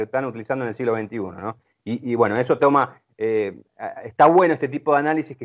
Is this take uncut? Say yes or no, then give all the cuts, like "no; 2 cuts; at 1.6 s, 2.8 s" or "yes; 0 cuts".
yes; 0 cuts